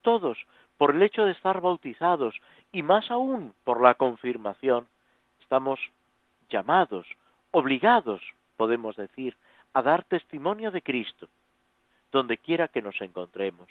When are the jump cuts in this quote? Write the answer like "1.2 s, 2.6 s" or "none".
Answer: none